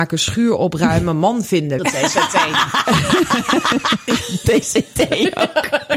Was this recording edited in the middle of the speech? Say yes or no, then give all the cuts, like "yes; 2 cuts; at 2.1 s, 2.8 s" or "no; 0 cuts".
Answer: yes; 1 cut; at 1.8 s